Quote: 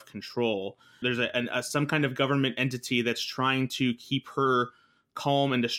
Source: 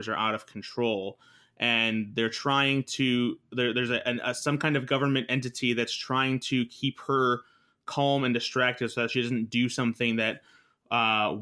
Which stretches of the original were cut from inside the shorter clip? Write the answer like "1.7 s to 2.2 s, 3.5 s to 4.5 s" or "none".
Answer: 1.4 s to 3.7 s